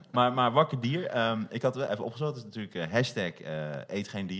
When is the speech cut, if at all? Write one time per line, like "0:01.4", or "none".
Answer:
0:01.9